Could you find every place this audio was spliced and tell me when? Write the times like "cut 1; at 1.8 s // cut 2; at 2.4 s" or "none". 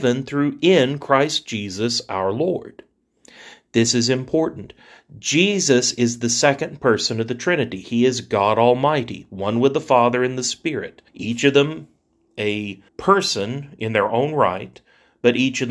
cut 1; at 11.1 s // cut 2; at 12.9 s

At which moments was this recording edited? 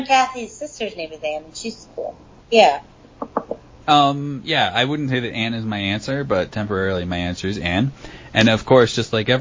cut 1; at 2.4 s // cut 2; at 3.8 s

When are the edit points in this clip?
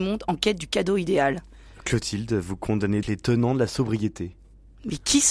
cut 1; at 3.0 s

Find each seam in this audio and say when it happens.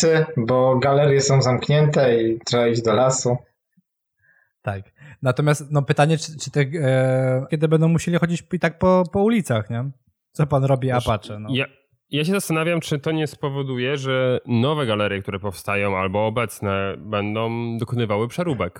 cut 1; at 7.5 s

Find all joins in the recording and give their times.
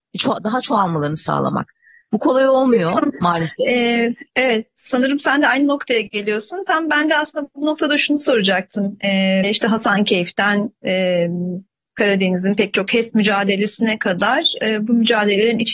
cut 1; at 9.4 s

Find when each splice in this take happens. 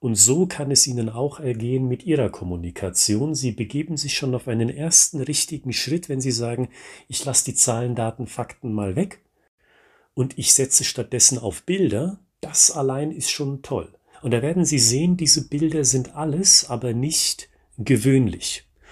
cut 1; at 14.1 s

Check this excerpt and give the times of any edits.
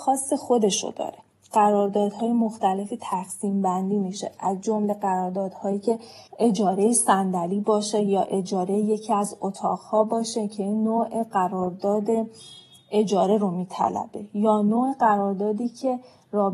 cut 1; at 6.3 s

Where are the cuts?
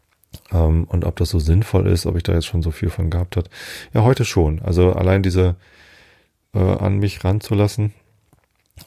cut 1; at 6.5 s

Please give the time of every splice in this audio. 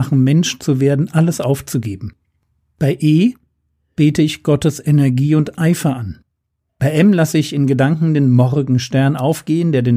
cut 1; at 6.7 s

